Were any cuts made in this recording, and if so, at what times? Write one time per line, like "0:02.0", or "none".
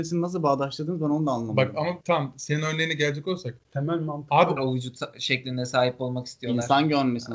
0:02.0
0:04.6